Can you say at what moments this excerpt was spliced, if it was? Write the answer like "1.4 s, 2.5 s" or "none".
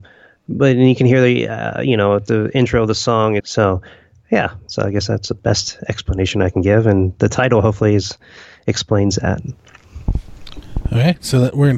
3.4 s